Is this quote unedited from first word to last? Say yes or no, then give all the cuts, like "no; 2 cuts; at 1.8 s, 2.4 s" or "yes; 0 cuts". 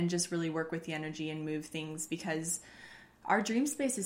yes; 0 cuts